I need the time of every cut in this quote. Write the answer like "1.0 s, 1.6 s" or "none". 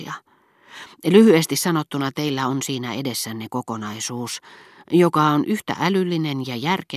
0.9 s